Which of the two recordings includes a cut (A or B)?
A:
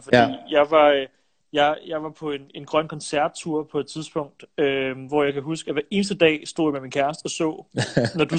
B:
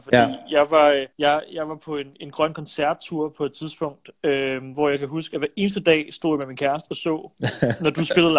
B